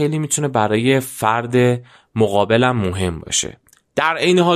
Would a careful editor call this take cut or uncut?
uncut